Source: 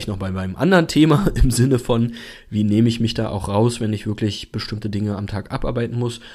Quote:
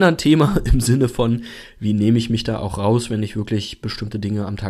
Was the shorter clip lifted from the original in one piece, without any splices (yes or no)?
yes